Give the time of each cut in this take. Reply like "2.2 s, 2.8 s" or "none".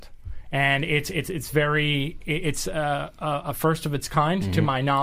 none